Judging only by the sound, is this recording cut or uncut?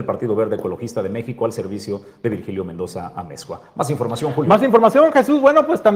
uncut